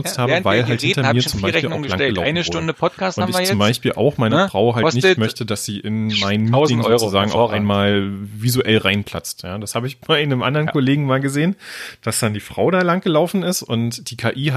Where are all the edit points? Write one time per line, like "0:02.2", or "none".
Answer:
none